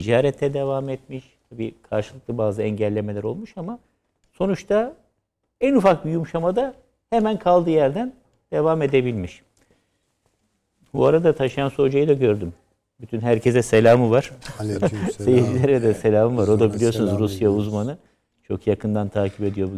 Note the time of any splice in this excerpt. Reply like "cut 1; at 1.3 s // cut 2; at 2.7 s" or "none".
none